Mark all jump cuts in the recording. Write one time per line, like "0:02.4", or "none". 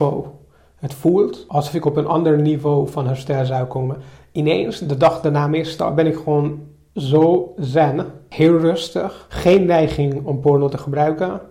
none